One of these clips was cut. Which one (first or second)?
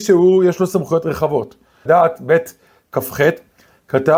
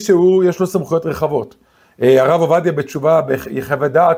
first